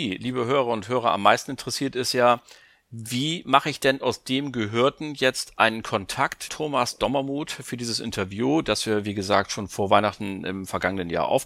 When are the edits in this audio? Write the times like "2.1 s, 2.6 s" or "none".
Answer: 6.5 s